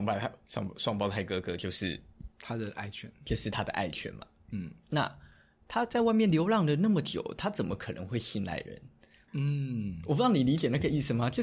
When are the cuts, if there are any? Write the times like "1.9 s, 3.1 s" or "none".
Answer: 9.3 s